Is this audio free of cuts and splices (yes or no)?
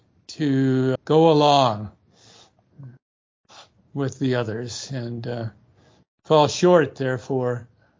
no